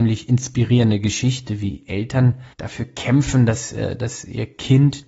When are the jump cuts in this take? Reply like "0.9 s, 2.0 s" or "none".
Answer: 2.5 s